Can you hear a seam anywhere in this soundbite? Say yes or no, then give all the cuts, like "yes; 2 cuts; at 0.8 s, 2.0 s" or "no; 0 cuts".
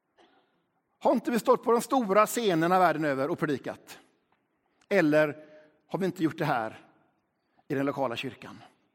no; 0 cuts